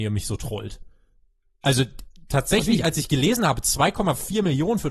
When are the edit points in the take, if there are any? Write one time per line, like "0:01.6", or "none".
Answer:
none